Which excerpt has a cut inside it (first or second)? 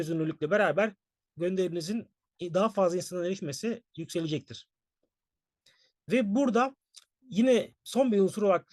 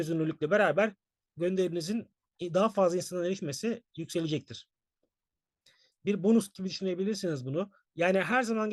second